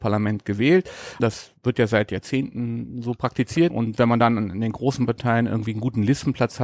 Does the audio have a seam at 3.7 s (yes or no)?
yes